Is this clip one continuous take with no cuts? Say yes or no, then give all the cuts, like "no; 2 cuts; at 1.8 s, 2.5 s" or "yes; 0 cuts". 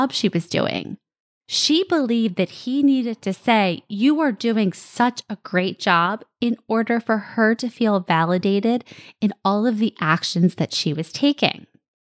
yes; 0 cuts